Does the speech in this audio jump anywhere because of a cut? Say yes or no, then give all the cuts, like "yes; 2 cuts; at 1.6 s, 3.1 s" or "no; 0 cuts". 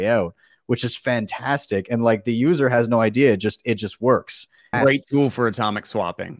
yes; 1 cut; at 4.7 s